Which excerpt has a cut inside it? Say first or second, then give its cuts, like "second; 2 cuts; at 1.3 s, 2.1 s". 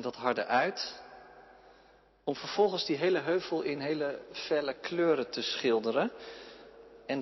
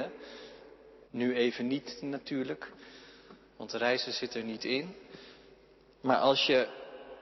second; 1 cut; at 1.0 s